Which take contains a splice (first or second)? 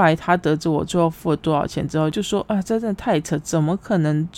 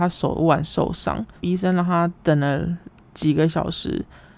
second